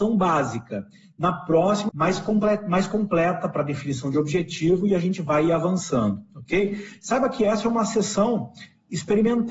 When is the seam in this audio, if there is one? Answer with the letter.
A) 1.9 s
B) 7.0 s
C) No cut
A